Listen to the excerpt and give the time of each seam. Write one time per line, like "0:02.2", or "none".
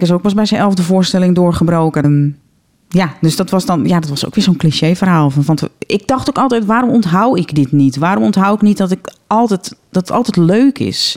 0:02.0